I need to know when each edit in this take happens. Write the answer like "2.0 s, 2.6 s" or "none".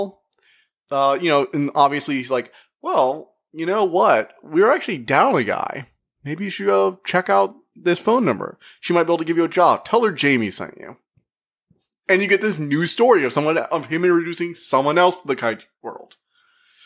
none